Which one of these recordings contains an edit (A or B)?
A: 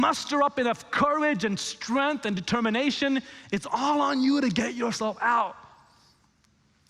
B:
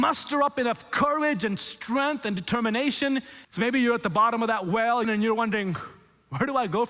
B